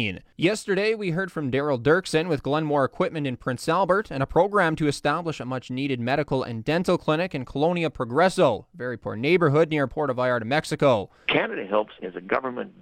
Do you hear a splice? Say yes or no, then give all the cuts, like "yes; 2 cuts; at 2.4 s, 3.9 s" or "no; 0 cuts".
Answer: yes; 1 cut; at 11.3 s